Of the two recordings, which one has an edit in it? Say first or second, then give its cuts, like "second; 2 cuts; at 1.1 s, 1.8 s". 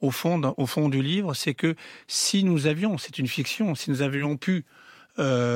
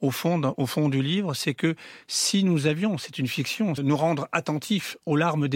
second; 1 cut; at 3.8 s